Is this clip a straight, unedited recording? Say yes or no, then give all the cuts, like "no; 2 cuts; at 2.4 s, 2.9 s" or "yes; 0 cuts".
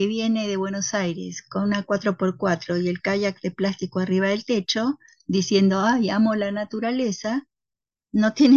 yes; 0 cuts